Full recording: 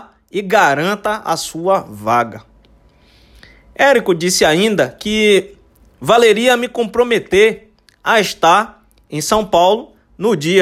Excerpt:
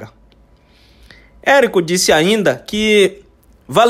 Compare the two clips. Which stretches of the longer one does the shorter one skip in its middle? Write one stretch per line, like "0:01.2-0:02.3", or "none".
none